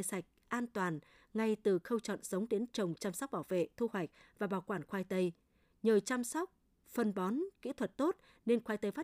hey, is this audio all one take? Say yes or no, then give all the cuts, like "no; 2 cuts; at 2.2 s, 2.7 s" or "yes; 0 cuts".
yes; 0 cuts